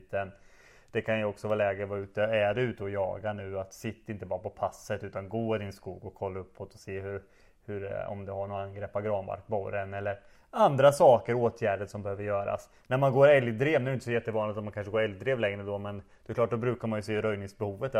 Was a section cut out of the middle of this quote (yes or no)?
no